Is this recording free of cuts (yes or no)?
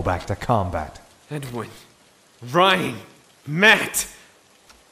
yes